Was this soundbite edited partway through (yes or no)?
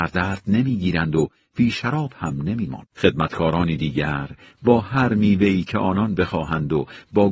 yes